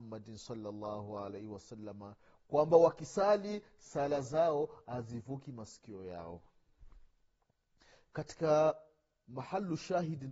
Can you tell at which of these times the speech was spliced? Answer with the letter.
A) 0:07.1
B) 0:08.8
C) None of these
C